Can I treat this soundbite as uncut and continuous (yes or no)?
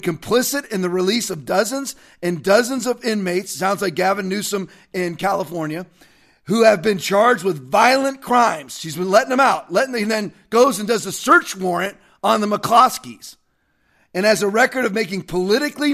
yes